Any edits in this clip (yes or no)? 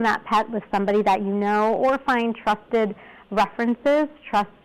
no